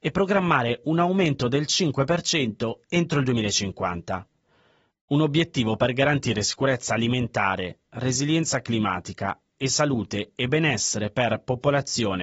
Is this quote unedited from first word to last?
no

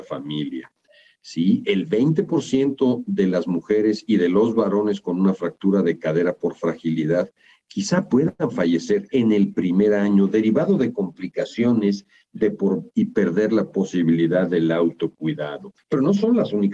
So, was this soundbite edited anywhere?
yes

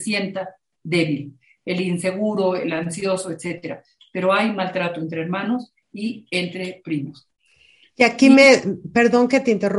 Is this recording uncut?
yes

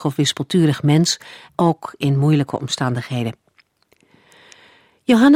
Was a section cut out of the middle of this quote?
yes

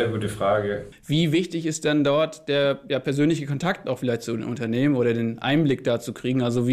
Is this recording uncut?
no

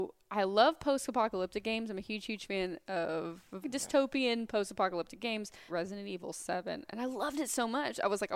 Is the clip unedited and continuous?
no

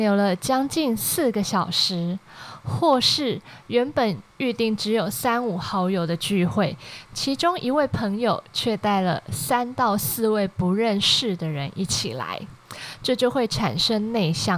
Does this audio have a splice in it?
no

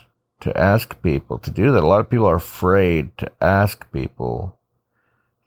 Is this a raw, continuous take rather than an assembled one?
yes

